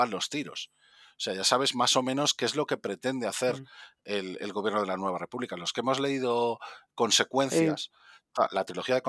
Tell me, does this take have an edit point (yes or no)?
no